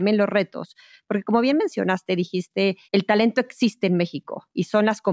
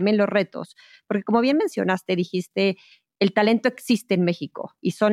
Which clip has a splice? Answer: first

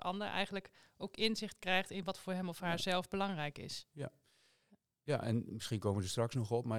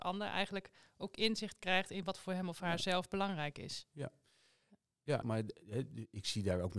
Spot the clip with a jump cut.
second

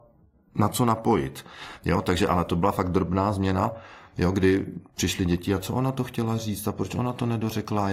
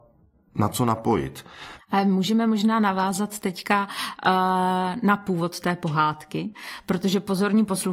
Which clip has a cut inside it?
second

